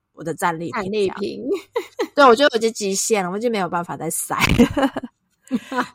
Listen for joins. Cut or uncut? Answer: uncut